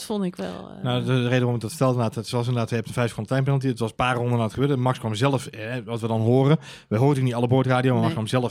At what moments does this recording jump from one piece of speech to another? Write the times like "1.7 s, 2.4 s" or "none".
none